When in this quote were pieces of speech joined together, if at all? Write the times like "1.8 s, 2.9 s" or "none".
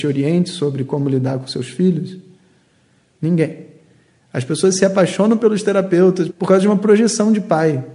3.1 s, 6.3 s